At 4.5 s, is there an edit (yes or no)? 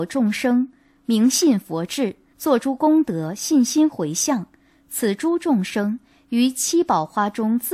no